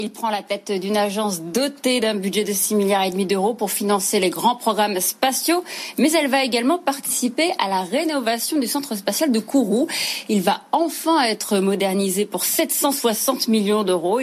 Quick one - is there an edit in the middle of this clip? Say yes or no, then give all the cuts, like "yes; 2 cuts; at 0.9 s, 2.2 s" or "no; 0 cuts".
no; 0 cuts